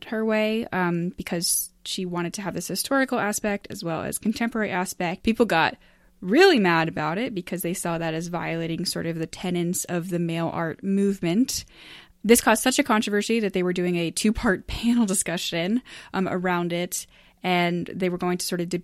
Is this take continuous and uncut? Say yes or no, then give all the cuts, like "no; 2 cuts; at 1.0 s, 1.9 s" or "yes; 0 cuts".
no; 1 cut; at 5.2 s